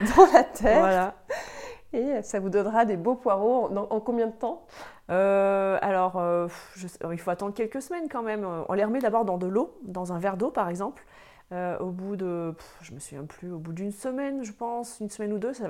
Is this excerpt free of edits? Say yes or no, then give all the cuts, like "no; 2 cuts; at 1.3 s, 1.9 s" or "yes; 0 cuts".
yes; 0 cuts